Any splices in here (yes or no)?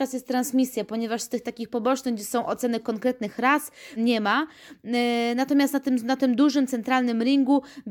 yes